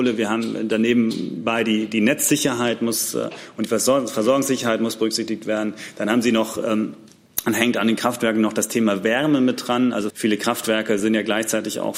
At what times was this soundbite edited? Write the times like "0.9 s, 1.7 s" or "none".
10.1 s